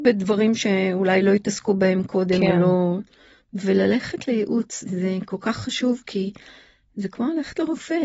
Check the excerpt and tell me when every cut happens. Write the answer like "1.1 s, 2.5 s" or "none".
4.8 s